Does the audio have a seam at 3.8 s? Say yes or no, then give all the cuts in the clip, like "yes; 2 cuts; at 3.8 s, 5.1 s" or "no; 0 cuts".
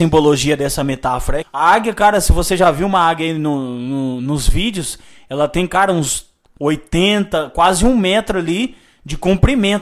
no; 1 cut; at 1.4 s